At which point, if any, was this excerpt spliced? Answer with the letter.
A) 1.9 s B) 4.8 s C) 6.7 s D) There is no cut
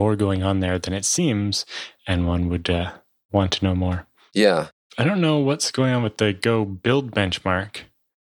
D